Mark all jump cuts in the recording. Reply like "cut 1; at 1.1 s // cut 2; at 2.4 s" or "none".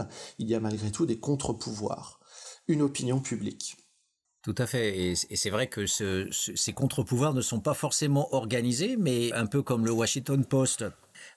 cut 1; at 4.3 s // cut 2; at 9.3 s